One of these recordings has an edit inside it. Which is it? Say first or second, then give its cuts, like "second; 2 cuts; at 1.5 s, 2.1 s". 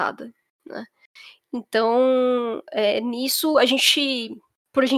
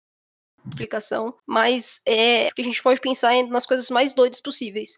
second; 2 cuts; at 1.4 s, 2.5 s